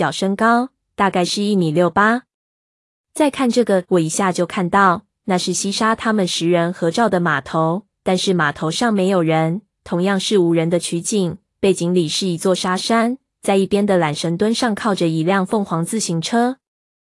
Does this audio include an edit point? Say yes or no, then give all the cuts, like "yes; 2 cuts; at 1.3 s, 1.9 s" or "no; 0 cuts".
yes; 1 cut; at 3.8 s